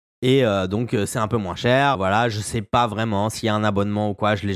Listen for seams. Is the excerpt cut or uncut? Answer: cut